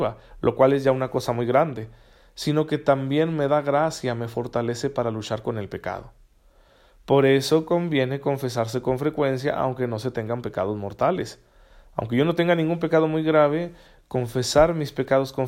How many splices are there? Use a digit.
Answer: 0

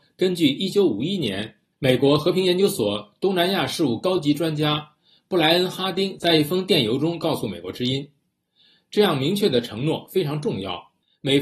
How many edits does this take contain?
1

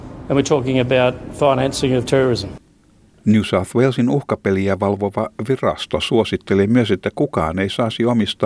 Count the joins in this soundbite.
0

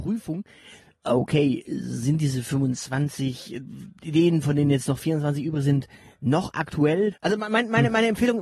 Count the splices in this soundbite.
2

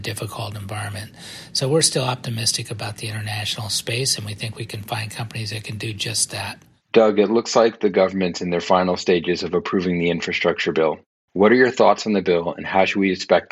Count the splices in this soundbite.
0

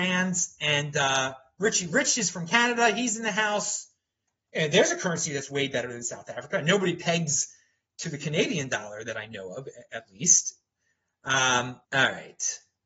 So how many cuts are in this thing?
1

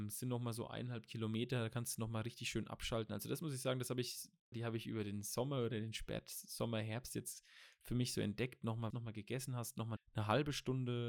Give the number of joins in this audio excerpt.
3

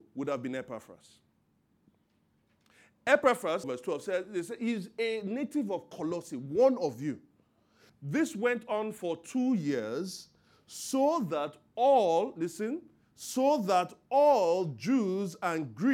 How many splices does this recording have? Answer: 2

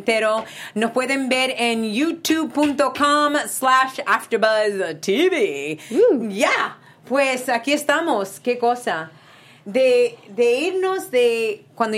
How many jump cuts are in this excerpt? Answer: 0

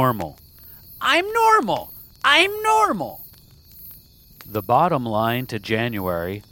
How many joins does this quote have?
0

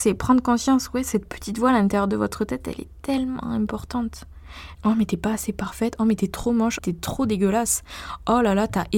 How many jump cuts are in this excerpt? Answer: 2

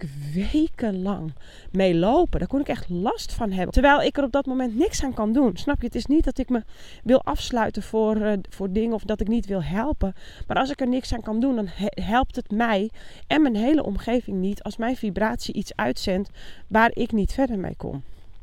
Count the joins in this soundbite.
1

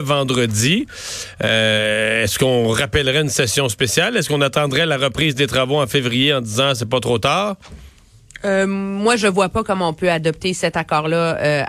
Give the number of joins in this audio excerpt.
0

